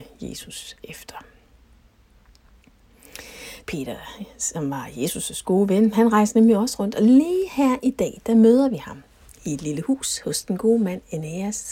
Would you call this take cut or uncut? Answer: cut